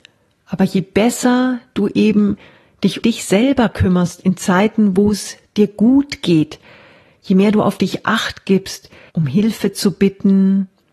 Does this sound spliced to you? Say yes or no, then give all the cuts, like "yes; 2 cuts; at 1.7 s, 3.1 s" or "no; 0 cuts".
yes; 2 cuts; at 3.0 s, 9.1 s